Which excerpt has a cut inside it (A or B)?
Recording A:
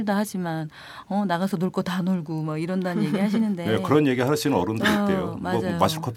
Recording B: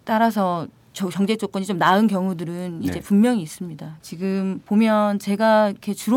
B